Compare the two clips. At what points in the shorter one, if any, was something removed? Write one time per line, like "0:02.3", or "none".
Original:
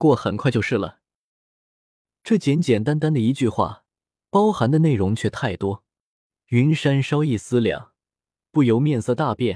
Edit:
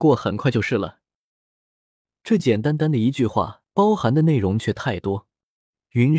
0:02.4
0:03.7